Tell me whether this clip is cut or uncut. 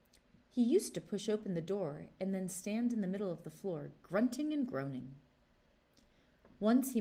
uncut